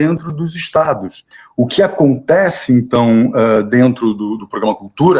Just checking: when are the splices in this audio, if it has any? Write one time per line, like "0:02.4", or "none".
none